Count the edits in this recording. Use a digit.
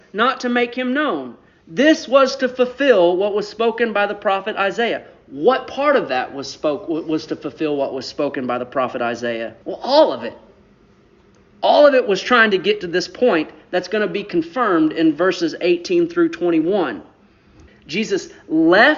2